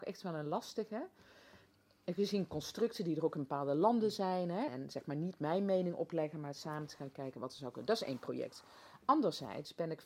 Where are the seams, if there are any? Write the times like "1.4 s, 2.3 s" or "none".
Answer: 4.7 s